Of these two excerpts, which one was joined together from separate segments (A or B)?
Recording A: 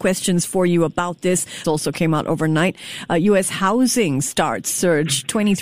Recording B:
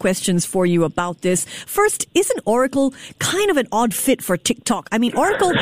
A